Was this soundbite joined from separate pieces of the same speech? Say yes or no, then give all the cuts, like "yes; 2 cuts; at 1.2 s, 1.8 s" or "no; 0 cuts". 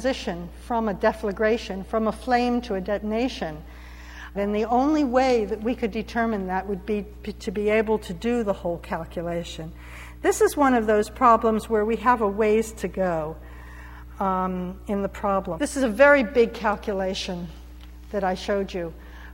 yes; 2 cuts; at 4.3 s, 15.6 s